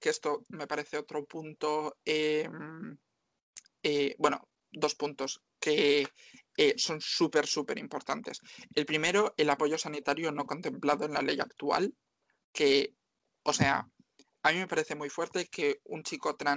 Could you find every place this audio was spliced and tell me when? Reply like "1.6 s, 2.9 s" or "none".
none